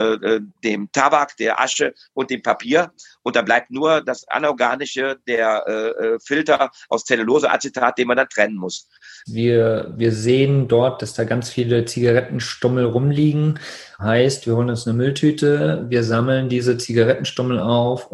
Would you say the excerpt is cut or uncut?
cut